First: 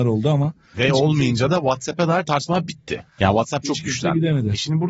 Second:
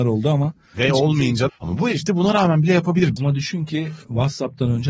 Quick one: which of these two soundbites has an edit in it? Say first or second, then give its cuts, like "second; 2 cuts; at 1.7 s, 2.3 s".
second; 2 cuts; at 1.5 s, 3.2 s